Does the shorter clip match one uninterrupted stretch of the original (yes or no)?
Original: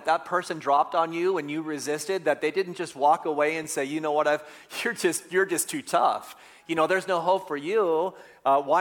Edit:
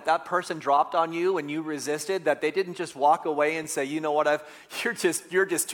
yes